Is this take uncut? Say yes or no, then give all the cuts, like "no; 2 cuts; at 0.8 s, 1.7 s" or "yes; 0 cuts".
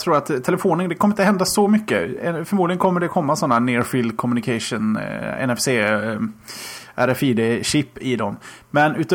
yes; 0 cuts